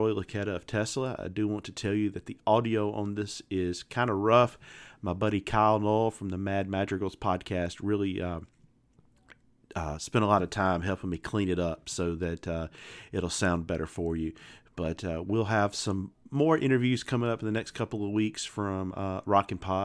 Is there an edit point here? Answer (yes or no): no